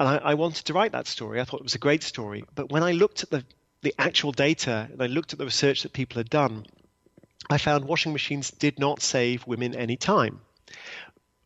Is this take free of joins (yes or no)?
yes